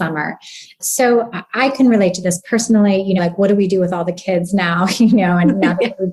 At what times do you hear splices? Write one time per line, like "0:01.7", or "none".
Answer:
0:03.2